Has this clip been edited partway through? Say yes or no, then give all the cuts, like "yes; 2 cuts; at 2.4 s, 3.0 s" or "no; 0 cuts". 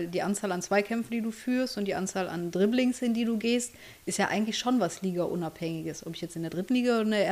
no; 0 cuts